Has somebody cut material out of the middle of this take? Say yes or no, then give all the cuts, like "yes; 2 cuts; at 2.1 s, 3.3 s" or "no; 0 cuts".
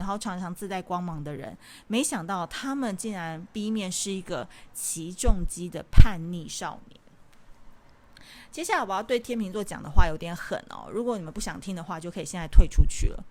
no; 0 cuts